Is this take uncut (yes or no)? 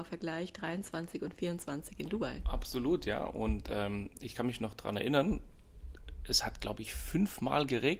yes